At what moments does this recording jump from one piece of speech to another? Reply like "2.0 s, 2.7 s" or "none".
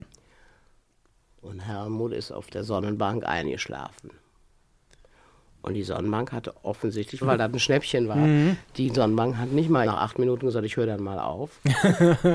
7.2 s, 9.8 s